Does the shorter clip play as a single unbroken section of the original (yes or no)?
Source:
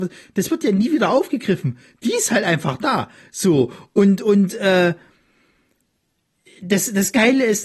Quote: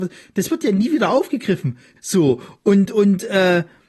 no